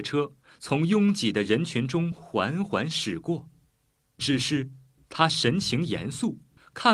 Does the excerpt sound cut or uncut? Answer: uncut